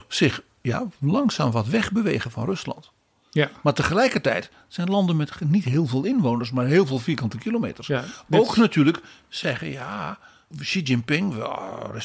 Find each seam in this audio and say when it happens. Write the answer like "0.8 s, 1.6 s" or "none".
none